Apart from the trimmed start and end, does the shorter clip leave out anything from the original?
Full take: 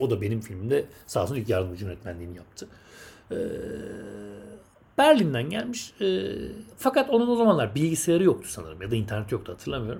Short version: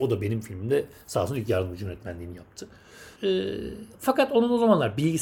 yes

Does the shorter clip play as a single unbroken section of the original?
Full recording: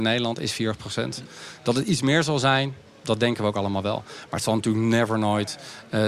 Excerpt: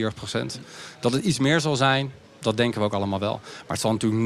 yes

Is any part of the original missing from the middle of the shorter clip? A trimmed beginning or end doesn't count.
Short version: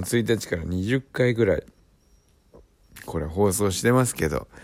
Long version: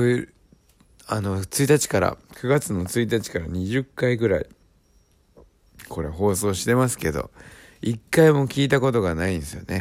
no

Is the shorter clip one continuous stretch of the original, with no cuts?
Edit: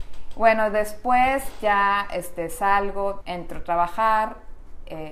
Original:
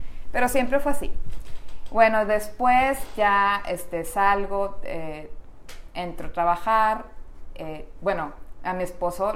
no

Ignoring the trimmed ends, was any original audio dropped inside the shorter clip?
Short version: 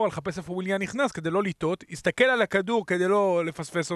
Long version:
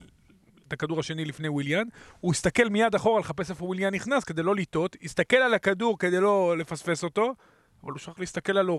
no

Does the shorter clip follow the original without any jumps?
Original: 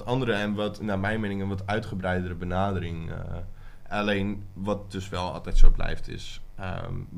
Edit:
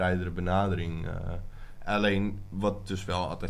yes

